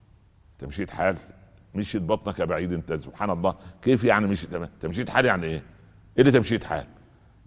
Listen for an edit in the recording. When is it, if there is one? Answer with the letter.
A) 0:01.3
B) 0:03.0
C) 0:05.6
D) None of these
D